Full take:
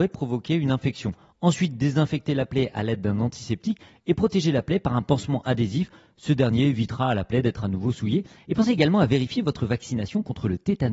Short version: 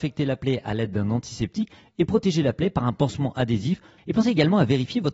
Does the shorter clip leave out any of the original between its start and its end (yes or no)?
yes